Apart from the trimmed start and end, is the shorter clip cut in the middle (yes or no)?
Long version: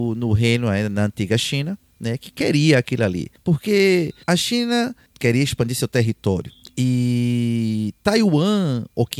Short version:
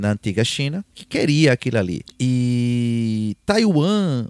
yes